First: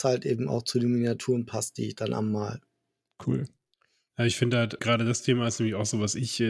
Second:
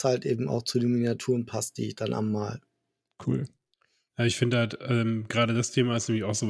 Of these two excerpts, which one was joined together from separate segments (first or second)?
first